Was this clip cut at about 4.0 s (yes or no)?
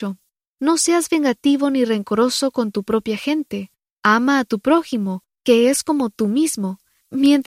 no